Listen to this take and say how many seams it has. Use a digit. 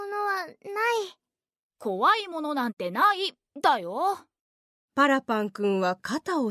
0